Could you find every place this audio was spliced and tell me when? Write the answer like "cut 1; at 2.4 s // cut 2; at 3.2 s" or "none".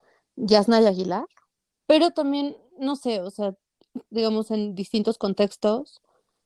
cut 1; at 1.8 s // cut 2; at 4.1 s